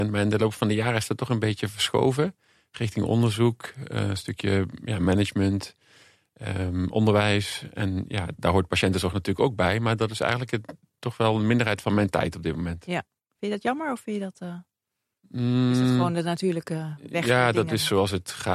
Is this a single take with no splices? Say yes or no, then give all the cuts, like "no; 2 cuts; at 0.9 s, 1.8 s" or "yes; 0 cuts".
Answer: no; 1 cut; at 8.4 s